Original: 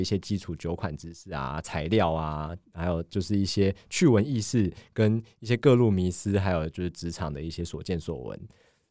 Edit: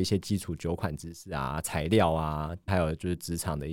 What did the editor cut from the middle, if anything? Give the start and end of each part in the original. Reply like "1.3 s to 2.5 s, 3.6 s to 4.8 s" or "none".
2.7 s to 6.4 s